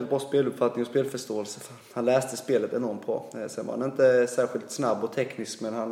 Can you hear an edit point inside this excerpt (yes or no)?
no